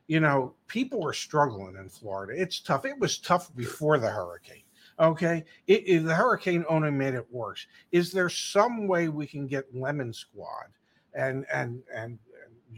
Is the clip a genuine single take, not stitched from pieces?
yes; 0 cuts

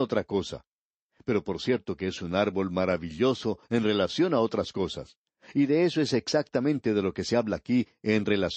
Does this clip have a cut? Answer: no; 0 cuts

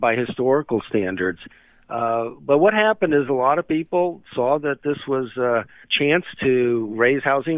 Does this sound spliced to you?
no; 0 cuts

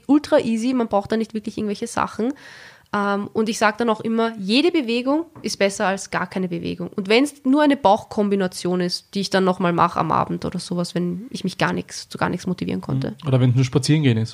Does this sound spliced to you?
no; 0 cuts

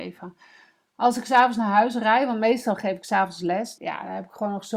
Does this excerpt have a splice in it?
yes; 1 cut; at 3.8 s

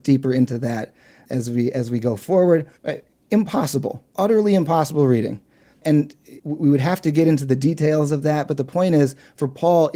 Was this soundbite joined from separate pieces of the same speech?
yes; 3 cuts; at 2.8 s, 4.1 s, 6.4 s

